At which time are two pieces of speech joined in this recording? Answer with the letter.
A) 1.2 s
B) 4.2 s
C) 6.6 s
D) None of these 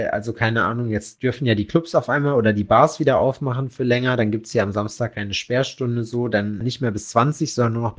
C